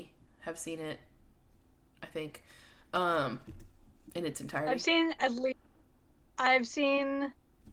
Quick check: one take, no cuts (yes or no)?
yes